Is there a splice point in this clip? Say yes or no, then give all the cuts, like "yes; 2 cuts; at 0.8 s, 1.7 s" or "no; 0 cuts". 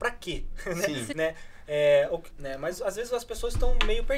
yes; 2 cuts; at 1.1 s, 2.3 s